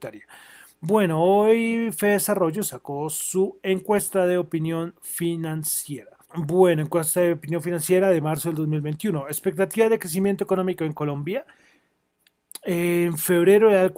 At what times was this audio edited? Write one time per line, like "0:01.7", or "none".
0:06.2